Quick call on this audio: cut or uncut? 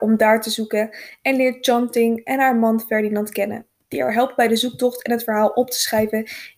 uncut